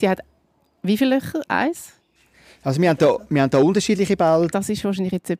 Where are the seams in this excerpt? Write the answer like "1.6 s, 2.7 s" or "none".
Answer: 4.5 s